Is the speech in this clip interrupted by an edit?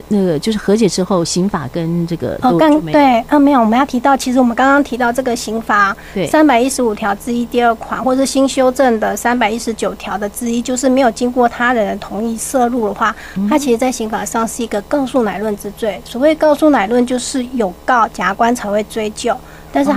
no; 0 cuts

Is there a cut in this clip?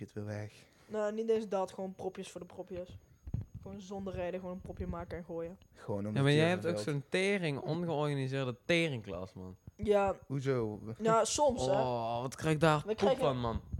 no; 0 cuts

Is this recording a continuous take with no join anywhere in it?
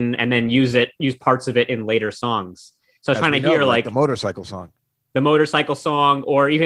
yes; 0 cuts

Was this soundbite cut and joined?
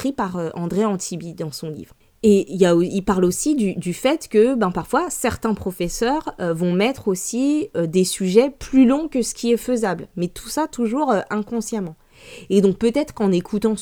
no; 0 cuts

